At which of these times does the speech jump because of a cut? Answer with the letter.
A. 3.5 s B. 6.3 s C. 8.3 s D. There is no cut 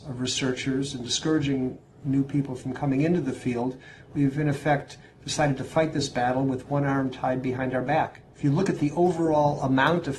C